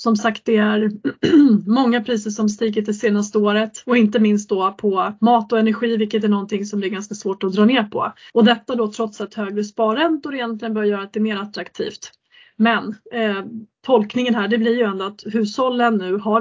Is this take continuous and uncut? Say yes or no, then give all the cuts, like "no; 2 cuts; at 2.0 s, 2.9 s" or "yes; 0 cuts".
no; 2 cuts; at 3.8 s, 8.3 s